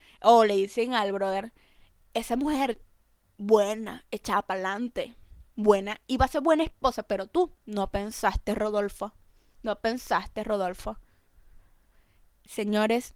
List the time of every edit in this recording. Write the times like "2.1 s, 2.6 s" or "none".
5.5 s

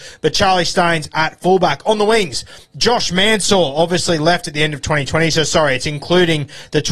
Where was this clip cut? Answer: none

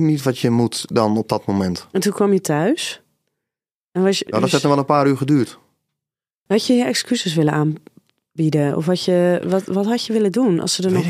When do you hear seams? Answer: 4.3 s, 6.5 s

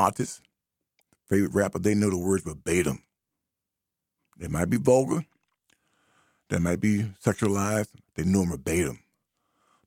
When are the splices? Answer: 8.0 s

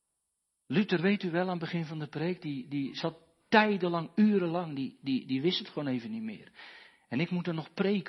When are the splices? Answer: none

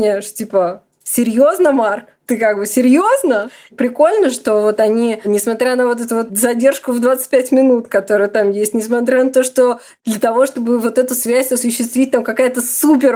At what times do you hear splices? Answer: none

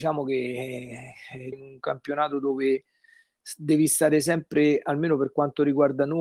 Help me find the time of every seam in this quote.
1.5 s

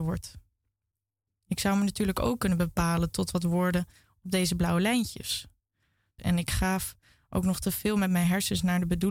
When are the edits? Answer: 1.3 s, 6.2 s

